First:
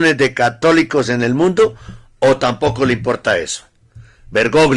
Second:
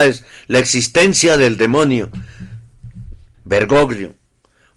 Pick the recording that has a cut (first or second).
second